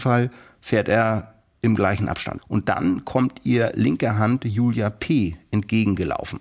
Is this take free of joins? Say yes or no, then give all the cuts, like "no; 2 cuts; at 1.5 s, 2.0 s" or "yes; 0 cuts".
no; 1 cut; at 2.4 s